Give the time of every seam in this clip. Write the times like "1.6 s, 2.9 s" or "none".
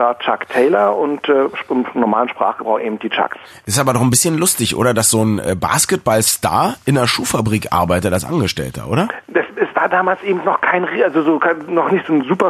none